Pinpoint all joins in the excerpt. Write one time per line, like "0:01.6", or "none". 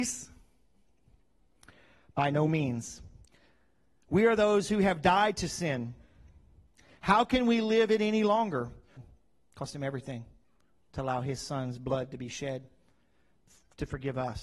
0:09.0